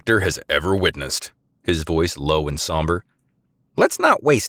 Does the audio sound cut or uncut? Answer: cut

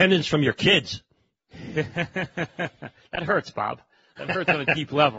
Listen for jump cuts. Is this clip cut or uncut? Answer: uncut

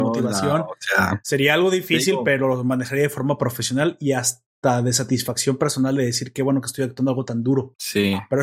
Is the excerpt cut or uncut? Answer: uncut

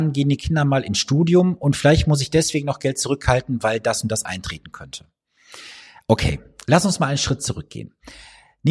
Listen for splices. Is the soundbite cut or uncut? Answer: uncut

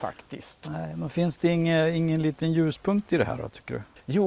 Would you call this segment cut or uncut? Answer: uncut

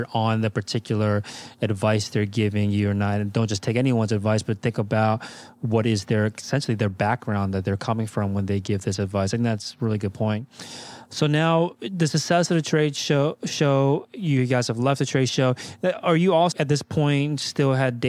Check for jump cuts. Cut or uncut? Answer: cut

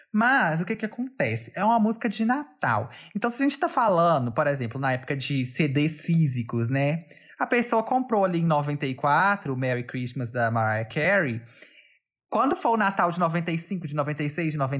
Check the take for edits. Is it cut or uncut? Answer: uncut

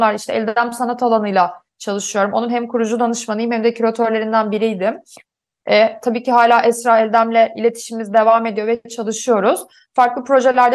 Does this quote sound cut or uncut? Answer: uncut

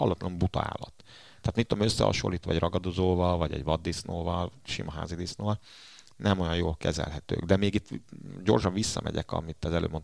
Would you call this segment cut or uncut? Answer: uncut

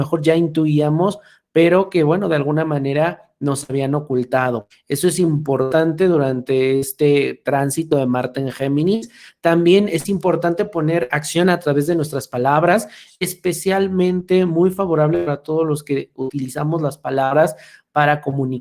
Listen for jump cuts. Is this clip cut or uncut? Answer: uncut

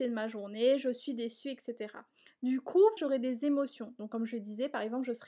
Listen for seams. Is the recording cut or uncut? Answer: cut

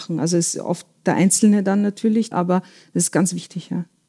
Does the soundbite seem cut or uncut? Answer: cut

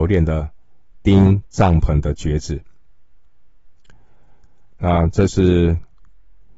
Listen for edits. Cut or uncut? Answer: cut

